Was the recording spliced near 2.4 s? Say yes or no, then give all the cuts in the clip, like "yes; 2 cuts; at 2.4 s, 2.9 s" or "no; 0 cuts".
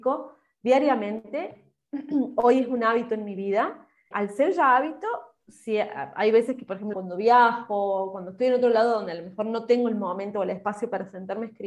no; 2 cuts; at 4.1 s, 6.9 s